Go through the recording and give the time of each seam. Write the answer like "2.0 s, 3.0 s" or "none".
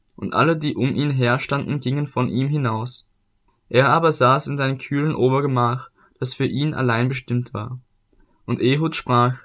3.5 s